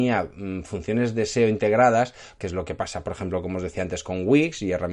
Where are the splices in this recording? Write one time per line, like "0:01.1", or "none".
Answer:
0:02.4